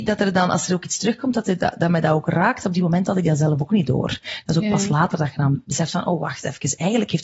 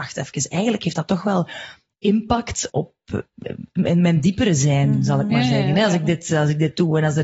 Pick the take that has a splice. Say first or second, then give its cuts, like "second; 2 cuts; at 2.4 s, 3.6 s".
second; 1 cut; at 2.7 s